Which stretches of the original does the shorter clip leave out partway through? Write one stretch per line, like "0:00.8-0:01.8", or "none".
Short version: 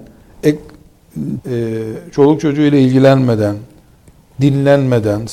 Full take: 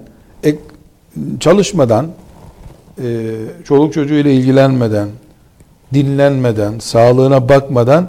0:01.4-0:02.9

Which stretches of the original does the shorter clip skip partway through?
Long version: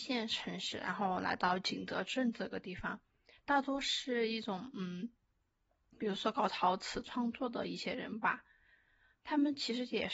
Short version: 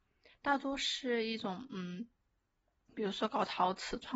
none

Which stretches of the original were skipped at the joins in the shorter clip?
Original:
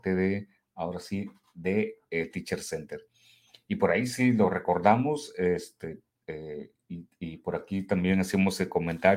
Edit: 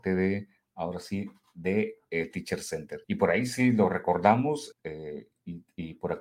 0:03.0-0:03.6
0:05.3-0:06.2

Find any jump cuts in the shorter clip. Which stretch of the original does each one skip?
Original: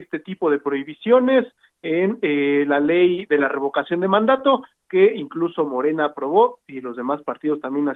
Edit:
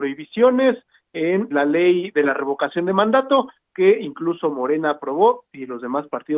0:02.2-0:02.7

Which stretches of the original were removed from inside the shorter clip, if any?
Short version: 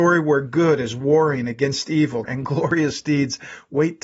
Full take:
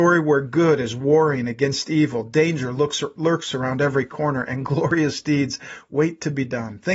0:02.2-0:04.4

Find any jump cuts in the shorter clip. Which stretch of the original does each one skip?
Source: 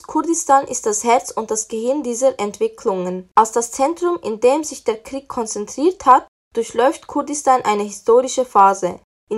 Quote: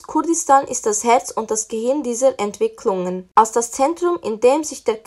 none

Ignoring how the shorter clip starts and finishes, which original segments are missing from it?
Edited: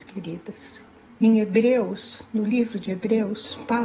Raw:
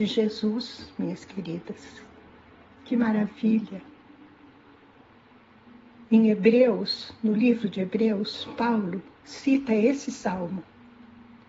0:02.3-0:06.0

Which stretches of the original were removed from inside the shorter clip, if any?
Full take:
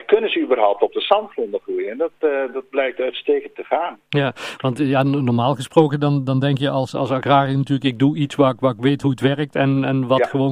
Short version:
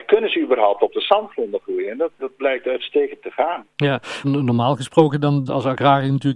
0:02.2-0:02.5
0:04.6-0:05.0
0:06.3-0:06.9

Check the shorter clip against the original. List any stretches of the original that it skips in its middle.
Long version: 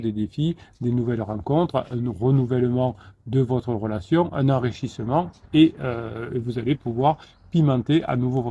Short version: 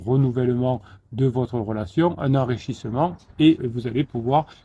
0:05.7-0:06.3

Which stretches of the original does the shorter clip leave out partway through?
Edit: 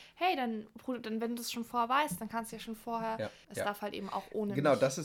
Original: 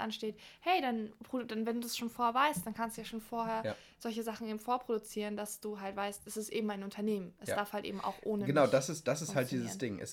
0:03.9-0:07.4

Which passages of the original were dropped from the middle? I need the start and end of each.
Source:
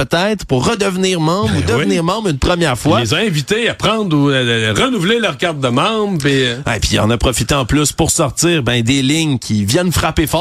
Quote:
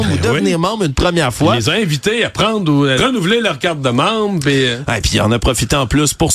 0:04.4-0:04.7

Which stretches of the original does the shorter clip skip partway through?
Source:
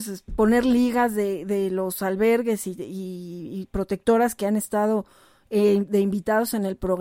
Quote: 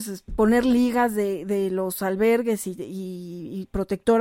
none

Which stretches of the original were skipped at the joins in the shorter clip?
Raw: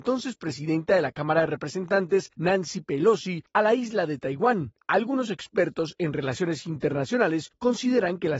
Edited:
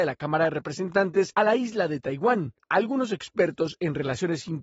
0:02.3-0:03.5

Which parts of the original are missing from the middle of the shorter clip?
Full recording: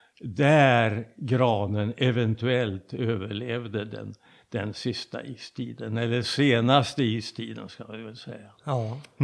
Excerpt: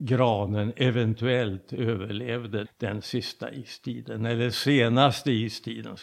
0:03.9-0:04.4

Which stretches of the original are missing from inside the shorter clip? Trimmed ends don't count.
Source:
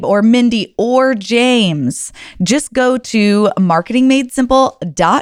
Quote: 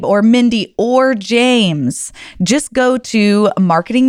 none

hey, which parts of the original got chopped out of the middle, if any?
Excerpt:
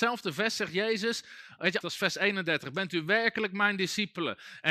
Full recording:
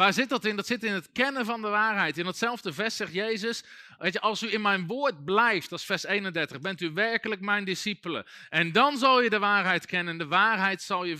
0:04.2-0:05.7

